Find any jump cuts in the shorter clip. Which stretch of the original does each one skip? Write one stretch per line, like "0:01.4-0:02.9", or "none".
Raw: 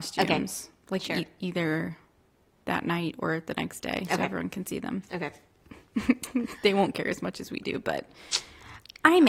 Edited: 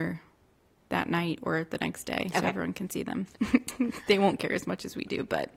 0:05.1-0:05.9

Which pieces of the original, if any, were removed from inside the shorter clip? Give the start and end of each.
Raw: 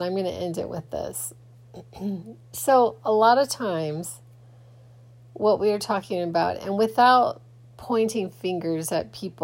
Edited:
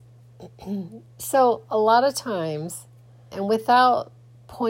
0:04.7-0:06.6

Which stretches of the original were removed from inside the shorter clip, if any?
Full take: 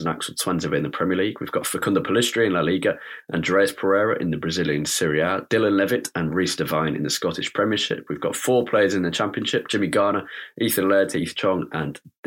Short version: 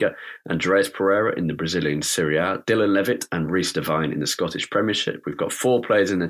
none

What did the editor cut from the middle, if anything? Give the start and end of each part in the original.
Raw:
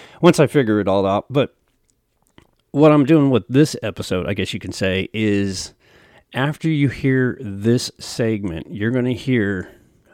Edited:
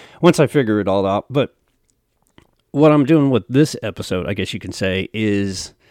none

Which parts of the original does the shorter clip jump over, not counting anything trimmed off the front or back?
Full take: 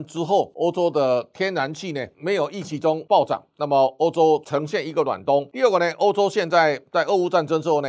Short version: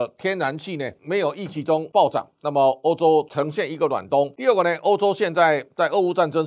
none

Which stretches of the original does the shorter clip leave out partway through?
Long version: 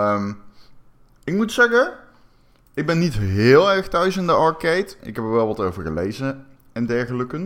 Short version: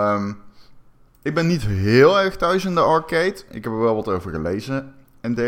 0:01.1-0:02.6

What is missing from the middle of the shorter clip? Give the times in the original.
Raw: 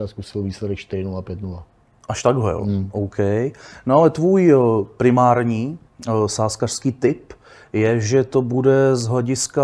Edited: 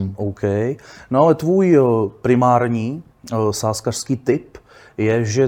none

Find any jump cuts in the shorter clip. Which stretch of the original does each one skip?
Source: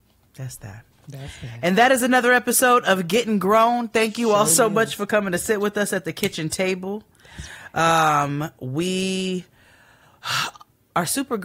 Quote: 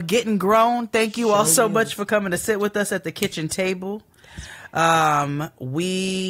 none

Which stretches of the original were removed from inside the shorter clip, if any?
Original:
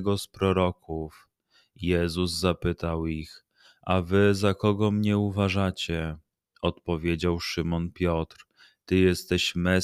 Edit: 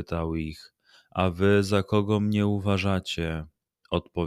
none

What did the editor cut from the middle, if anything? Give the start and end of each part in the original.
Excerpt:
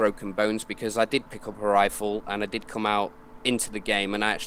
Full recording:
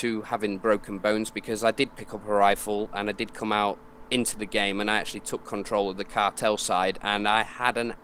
none

